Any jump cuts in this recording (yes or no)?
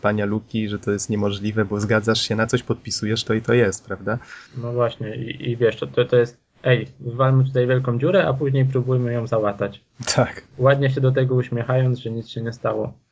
yes